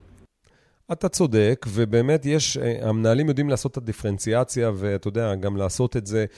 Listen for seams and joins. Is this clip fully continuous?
yes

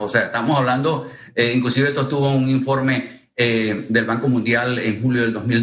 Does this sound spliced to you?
no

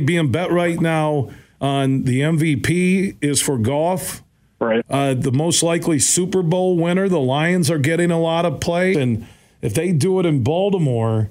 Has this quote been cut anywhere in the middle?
yes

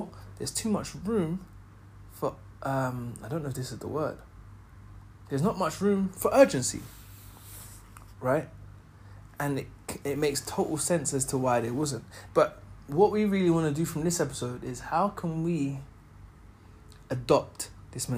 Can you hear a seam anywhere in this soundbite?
yes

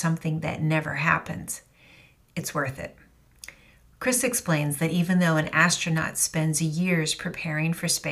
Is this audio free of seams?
no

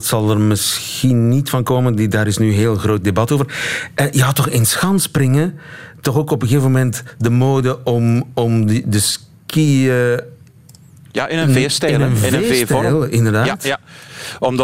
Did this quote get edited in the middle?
no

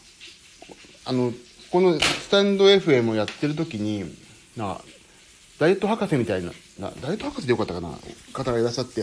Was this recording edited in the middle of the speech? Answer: no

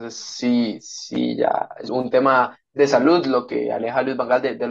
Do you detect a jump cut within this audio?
yes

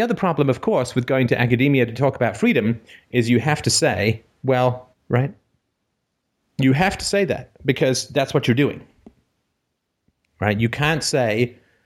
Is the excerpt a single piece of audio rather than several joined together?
no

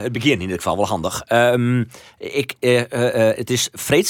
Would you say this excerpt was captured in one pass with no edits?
yes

